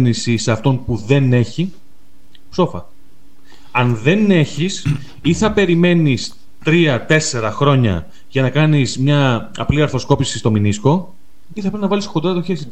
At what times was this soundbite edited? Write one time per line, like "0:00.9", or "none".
0:11.5